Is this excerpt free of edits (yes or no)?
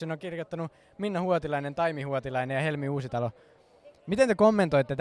yes